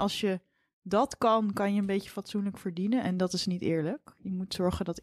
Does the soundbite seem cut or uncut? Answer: uncut